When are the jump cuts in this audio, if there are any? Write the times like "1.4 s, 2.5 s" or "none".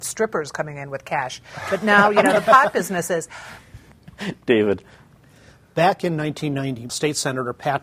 3.9 s, 6.9 s